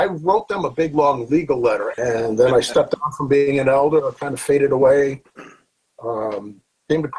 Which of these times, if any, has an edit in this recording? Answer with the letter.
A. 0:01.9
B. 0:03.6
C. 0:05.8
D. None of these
A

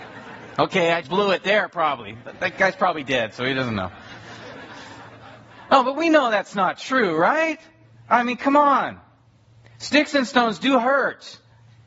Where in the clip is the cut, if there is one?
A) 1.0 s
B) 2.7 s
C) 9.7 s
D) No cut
A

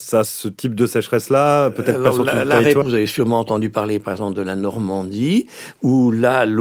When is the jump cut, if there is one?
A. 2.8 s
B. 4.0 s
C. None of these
A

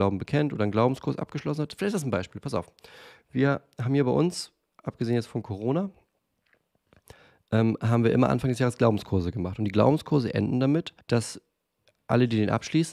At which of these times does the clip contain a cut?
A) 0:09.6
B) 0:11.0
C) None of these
B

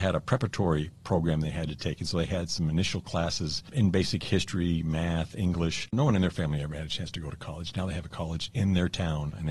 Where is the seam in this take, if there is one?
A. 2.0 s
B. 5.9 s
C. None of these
B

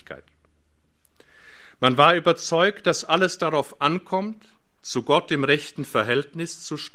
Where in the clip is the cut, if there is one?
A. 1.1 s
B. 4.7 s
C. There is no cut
C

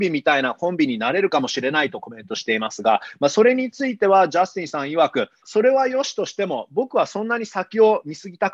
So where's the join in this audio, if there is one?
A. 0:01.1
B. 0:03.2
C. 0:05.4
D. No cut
C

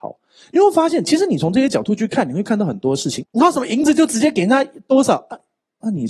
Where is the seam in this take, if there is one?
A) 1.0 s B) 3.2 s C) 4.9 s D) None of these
B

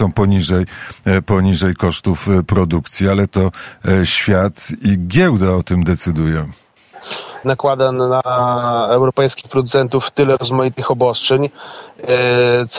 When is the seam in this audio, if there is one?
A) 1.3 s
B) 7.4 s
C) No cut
B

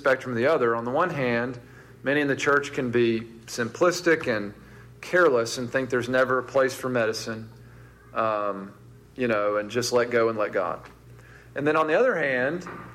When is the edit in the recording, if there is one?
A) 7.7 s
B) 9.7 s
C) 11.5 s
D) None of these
D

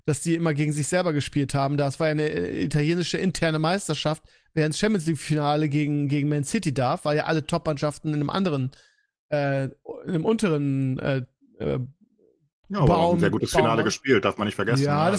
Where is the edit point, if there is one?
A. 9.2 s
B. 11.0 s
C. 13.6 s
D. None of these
D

